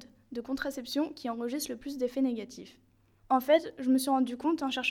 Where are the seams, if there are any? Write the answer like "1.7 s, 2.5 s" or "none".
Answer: 3.2 s